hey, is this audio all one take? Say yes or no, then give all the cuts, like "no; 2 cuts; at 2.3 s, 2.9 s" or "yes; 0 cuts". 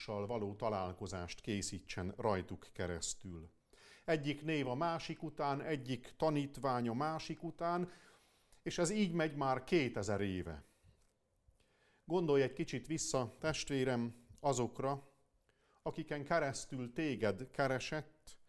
yes; 0 cuts